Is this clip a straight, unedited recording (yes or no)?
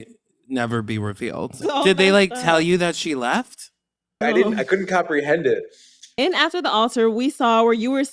no